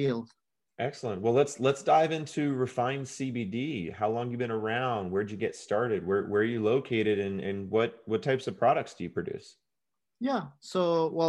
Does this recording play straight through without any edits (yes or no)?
yes